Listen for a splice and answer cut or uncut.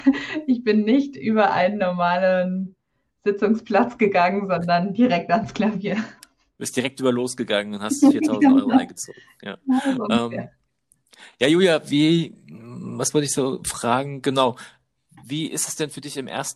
uncut